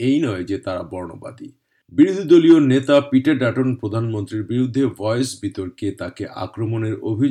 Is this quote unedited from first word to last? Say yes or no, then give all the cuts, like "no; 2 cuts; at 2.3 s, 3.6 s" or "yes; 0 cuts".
yes; 0 cuts